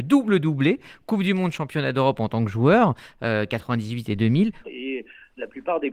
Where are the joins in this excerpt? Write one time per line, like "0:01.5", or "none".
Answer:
0:04.6